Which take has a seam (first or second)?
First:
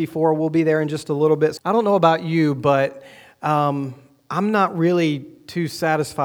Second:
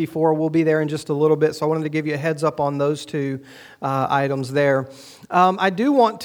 first